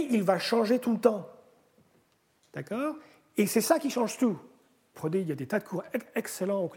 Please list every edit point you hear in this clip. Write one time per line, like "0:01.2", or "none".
0:04.9